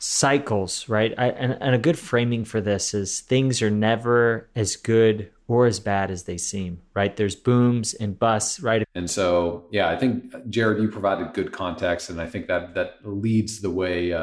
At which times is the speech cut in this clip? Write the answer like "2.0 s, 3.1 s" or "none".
8.8 s